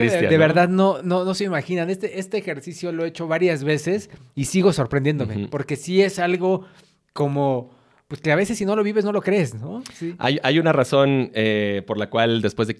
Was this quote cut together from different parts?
no; 0 cuts

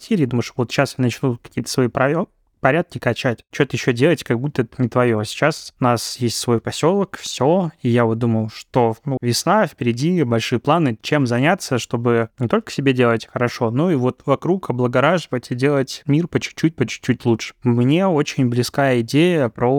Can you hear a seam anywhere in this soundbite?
yes; 1 cut; at 9.2 s

